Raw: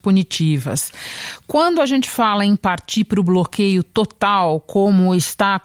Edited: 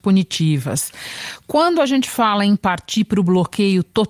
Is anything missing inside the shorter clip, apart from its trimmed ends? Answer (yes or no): no